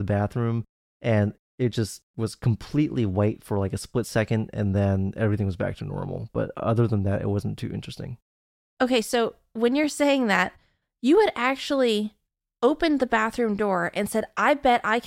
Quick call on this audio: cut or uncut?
uncut